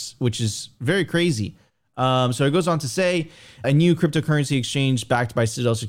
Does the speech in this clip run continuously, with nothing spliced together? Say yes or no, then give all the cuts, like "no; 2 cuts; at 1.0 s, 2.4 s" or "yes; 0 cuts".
no; 1 cut; at 3.6 s